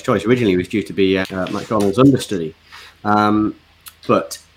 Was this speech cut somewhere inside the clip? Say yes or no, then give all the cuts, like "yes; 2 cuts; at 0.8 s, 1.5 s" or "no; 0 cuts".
yes; 1 cut; at 1.2 s